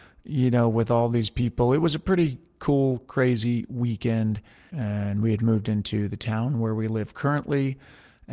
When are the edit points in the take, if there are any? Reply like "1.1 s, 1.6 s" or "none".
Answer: 4.7 s